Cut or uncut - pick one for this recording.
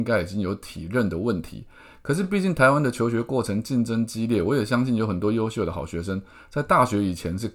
uncut